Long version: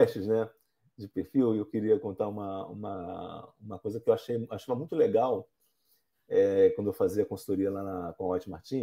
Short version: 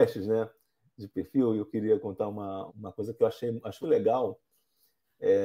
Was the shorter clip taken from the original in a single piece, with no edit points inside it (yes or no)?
no